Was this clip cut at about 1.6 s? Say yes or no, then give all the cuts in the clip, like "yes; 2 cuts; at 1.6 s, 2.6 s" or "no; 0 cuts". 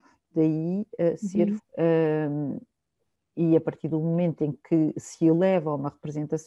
yes; 1 cut; at 1.6 s